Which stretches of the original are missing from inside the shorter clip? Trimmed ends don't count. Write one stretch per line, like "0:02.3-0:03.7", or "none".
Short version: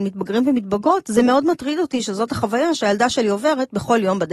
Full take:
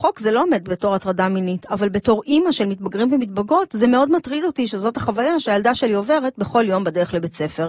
none